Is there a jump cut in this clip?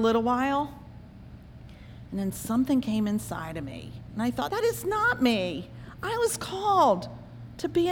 yes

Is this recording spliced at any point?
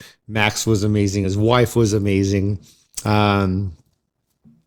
no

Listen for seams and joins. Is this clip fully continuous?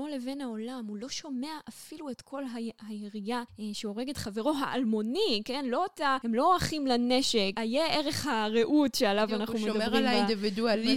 yes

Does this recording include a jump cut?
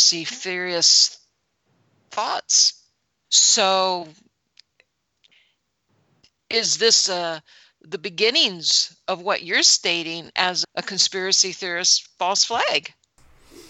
yes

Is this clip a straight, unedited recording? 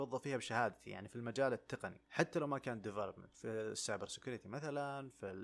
no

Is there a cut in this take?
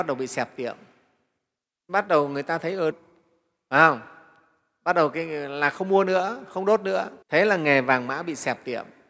yes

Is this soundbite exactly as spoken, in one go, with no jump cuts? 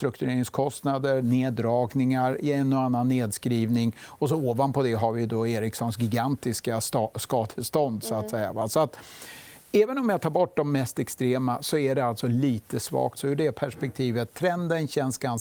no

